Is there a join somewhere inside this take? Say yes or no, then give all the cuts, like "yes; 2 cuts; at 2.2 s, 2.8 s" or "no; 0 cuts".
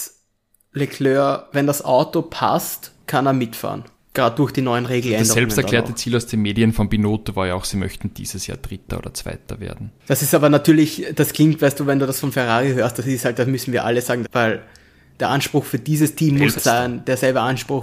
yes; 2 cuts; at 14.2 s, 16.5 s